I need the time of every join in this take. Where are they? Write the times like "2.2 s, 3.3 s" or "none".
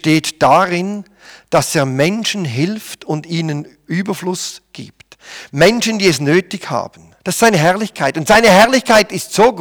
7.2 s